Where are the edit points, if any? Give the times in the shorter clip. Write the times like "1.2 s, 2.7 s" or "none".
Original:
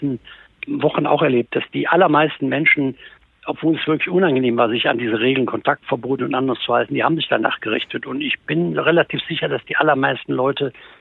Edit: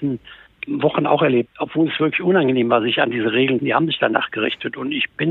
1.5 s, 3.6 s